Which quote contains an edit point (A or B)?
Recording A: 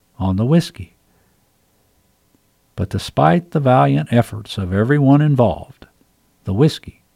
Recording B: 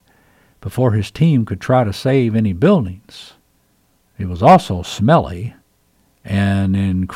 B